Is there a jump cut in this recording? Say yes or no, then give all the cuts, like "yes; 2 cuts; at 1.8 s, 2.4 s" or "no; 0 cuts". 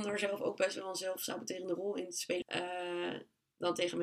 yes; 1 cut; at 2.4 s